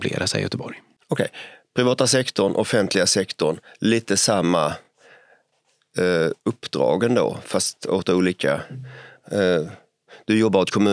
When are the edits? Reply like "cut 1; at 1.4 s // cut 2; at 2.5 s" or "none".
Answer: none